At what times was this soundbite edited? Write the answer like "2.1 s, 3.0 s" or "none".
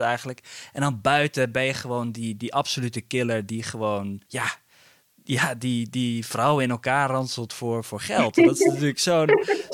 4.2 s

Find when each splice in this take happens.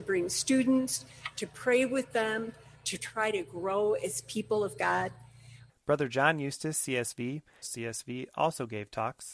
2.8 s, 5.7 s, 7.6 s

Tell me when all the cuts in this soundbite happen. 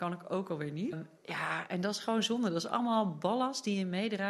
0.9 s

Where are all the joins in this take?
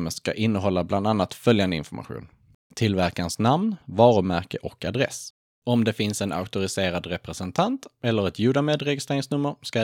3.8 s, 5.6 s

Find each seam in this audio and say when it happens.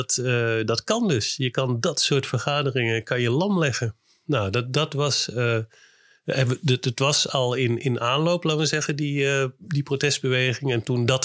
none

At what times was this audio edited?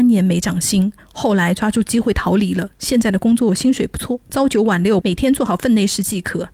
5.0 s

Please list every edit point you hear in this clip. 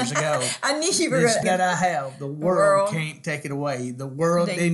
1.4 s

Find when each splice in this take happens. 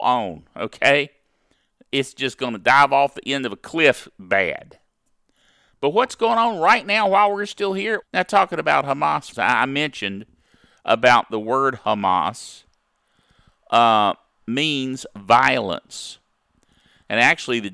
8.0 s, 9.3 s

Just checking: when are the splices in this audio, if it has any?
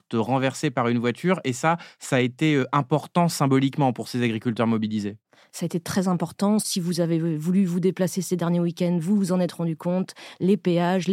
6.6 s

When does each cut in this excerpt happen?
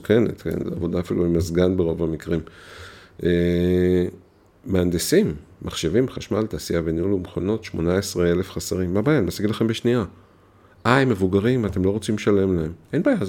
none

